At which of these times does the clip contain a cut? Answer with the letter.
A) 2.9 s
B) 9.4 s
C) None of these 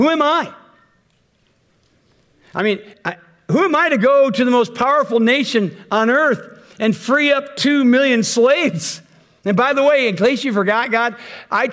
A